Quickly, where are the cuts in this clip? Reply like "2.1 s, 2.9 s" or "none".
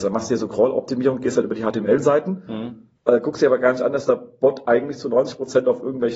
3.0 s

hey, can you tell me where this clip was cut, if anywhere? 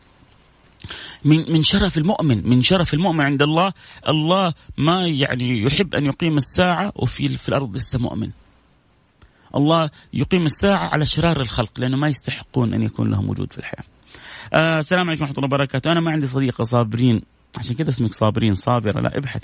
none

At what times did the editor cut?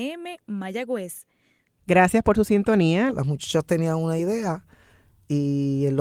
1.8 s, 3.1 s

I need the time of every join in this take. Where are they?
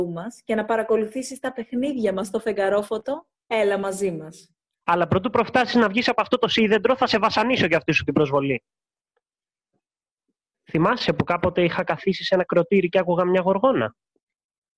4.8 s, 10.5 s

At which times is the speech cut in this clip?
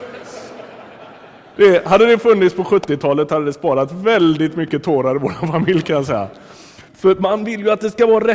1.6 s, 6.9 s

